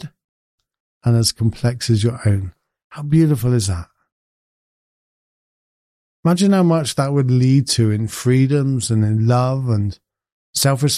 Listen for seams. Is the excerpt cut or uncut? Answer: uncut